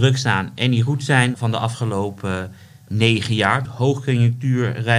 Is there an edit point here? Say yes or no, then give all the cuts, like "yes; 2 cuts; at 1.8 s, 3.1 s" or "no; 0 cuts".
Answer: yes; 2 cuts; at 1.3 s, 3.7 s